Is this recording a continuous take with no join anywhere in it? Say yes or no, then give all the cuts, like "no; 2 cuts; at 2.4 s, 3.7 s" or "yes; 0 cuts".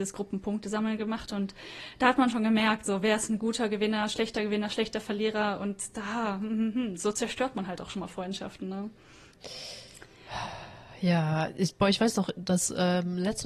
yes; 0 cuts